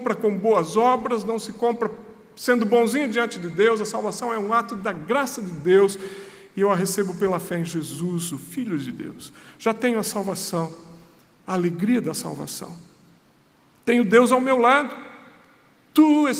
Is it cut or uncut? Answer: uncut